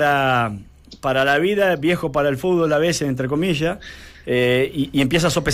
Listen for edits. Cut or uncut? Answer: uncut